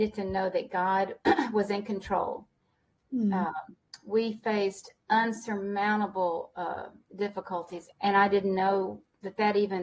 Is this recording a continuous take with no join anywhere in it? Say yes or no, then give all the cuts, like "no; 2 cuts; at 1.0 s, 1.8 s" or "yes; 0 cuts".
no; 1 cut; at 7.9 s